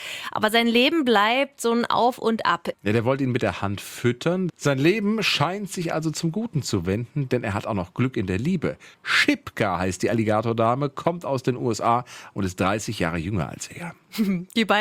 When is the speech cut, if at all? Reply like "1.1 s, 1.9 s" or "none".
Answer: 2.7 s, 4.5 s